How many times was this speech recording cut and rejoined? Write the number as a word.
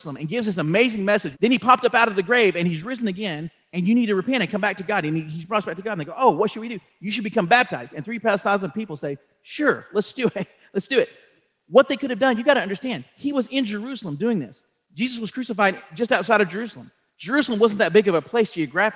one